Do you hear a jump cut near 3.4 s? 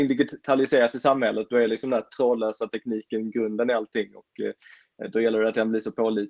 no; 0 cuts

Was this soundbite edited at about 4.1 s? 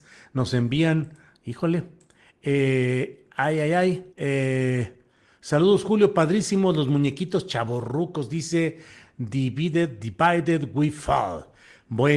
yes; 1 cut; at 4.1 s

